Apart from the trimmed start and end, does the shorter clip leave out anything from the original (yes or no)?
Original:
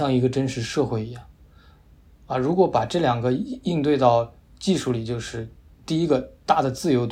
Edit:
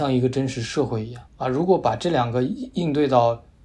yes